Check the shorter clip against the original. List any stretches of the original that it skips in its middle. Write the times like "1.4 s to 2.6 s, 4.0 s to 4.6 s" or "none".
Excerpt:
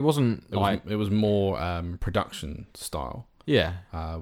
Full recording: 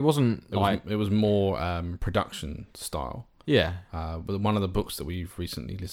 none